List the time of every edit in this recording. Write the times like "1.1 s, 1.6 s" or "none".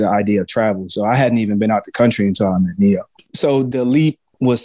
none